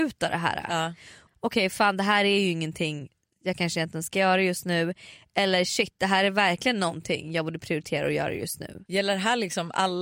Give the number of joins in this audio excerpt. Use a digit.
1